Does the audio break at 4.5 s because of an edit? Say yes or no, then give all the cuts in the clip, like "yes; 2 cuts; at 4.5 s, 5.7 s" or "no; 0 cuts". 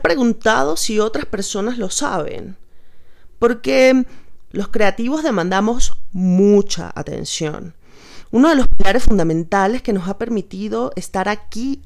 yes; 2 cuts; at 4.5 s, 8.2 s